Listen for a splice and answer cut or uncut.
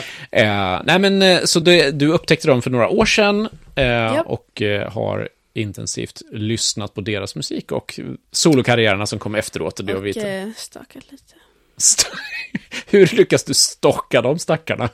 uncut